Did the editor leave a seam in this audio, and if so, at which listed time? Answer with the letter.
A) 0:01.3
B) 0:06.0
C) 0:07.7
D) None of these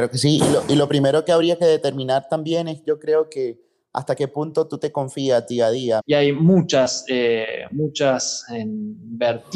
B